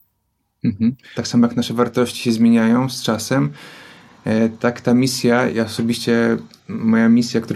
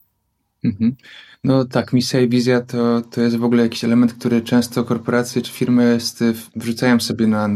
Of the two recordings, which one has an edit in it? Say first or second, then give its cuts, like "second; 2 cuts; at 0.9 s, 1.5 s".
first; 2 cuts; at 1.1 s, 5.5 s